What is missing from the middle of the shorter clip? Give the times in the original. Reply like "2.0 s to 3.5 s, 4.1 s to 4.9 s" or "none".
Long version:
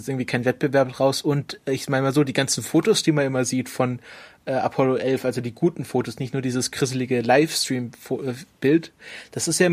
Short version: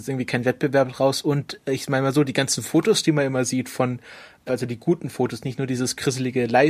4.5 s to 5.2 s